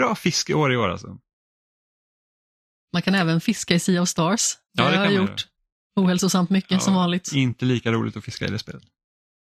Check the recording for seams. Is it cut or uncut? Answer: uncut